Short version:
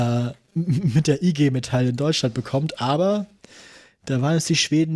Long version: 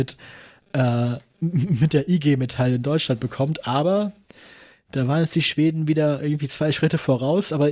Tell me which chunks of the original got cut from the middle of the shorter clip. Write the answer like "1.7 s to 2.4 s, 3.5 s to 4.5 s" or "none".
none